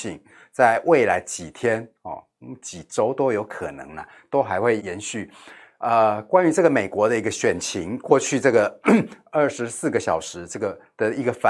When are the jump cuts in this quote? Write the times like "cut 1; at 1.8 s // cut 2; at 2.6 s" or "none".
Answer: cut 1; at 4.8 s